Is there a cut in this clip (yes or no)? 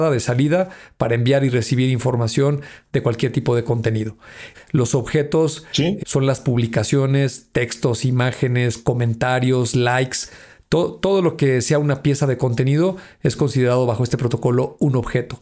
yes